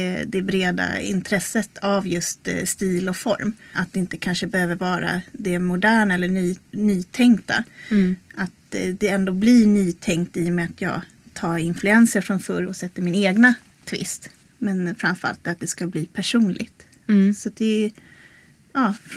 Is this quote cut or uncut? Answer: cut